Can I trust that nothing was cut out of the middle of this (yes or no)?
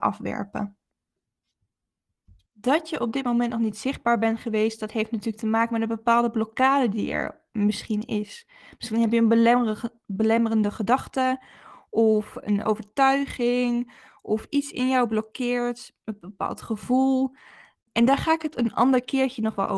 yes